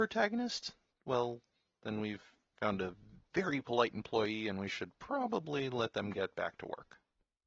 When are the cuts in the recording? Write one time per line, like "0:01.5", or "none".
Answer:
0:00.9